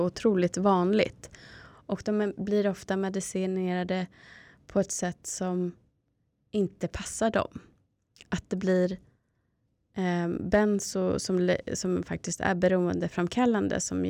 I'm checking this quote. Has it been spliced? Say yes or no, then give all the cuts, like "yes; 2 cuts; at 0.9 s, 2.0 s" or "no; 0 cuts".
yes; 1 cut; at 1.7 s